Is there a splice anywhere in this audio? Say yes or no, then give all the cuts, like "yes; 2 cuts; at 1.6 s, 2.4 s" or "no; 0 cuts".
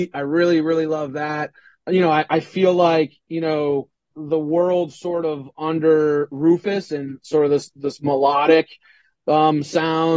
yes; 1 cut; at 4.1 s